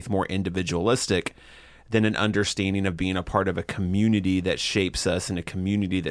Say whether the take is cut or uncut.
uncut